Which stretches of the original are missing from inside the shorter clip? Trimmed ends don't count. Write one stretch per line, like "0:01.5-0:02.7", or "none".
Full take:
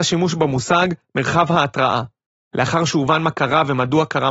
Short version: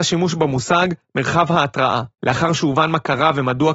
0:02.1-0:02.5